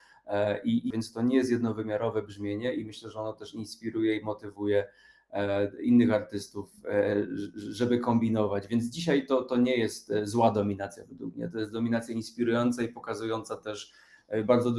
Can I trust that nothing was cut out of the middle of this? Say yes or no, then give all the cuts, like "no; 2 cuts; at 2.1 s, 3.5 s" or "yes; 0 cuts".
no; 1 cut; at 0.9 s